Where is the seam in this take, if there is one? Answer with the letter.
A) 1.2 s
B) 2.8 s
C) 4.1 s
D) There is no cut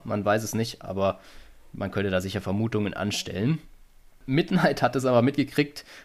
D